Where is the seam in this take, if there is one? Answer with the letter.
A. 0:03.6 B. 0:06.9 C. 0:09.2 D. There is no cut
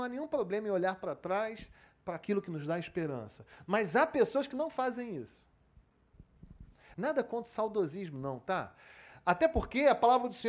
B